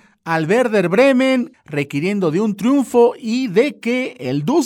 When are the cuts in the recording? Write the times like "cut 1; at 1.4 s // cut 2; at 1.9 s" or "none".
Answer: cut 1; at 1.5 s